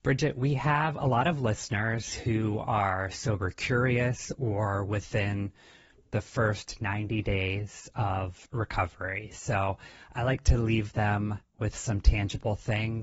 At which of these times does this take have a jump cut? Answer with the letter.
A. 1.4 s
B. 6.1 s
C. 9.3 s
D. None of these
D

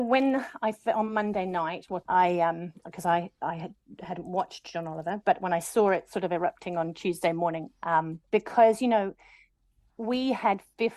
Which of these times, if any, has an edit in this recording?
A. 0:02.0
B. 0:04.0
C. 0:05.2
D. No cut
A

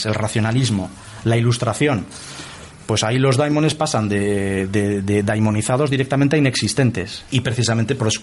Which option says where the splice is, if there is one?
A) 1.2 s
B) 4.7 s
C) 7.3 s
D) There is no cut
C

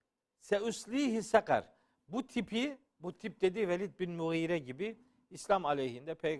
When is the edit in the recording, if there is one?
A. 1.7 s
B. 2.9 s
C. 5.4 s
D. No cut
B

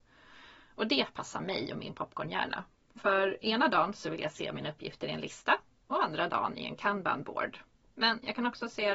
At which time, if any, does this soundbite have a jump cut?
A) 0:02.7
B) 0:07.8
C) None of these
C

